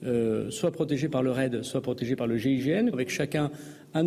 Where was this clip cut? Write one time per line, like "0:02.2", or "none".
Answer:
0:02.9